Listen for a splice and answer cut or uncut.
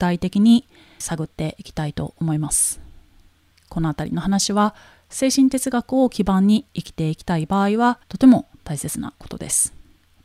cut